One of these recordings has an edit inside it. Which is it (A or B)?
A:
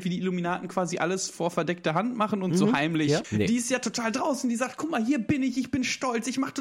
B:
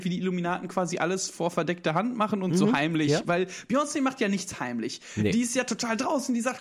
A